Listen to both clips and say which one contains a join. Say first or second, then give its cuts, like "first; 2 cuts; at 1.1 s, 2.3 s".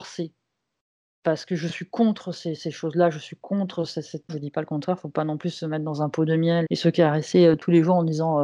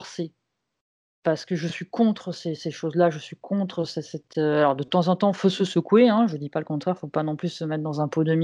first; 2 cuts; at 4.3 s, 6.6 s